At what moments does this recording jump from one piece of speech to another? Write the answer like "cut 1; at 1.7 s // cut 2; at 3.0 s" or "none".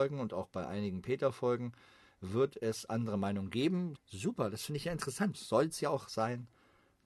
cut 1; at 3.9 s // cut 2; at 5.3 s